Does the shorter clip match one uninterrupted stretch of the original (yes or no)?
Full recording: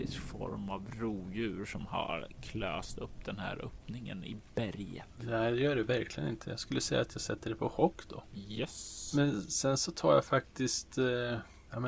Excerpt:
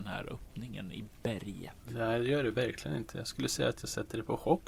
yes